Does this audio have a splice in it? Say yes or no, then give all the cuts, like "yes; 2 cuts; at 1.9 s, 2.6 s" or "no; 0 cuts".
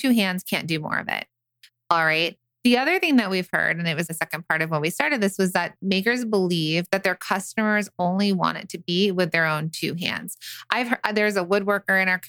no; 0 cuts